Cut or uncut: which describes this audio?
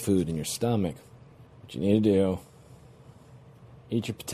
cut